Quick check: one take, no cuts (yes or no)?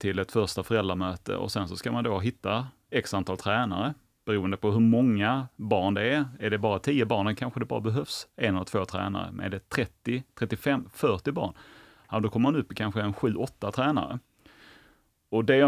yes